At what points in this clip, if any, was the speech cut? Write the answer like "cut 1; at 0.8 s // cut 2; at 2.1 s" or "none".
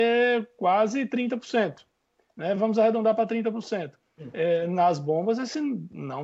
none